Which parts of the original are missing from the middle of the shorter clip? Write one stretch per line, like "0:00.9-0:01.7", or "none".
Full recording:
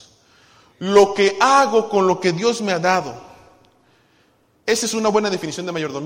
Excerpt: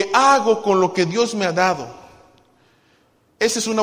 none